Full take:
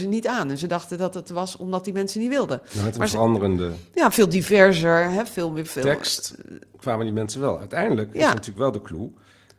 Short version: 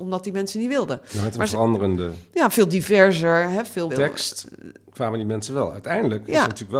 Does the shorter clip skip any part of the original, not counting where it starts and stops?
yes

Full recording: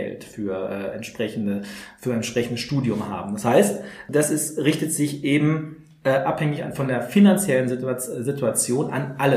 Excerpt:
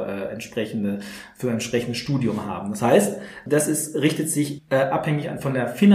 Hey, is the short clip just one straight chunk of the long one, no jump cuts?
no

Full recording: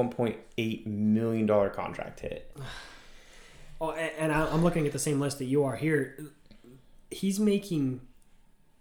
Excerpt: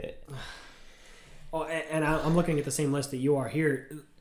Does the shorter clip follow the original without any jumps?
yes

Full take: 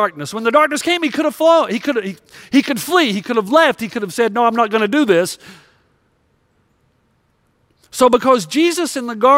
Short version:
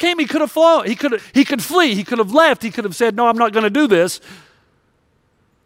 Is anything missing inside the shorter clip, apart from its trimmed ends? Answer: yes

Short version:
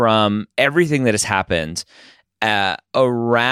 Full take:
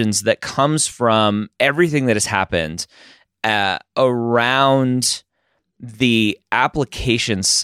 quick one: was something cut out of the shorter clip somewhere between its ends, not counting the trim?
no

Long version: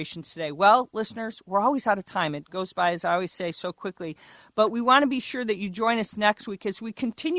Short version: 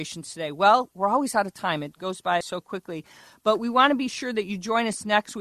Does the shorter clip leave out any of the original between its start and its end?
yes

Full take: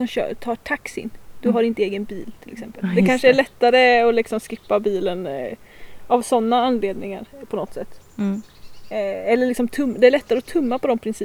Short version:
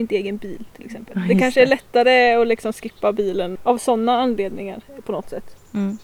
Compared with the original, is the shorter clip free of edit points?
no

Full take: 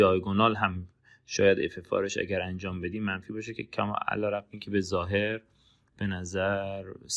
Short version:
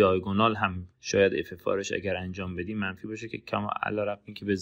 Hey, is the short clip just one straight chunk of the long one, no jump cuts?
no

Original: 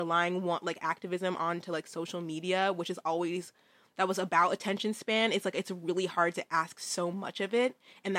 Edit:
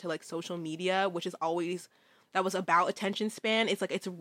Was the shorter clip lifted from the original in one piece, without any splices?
yes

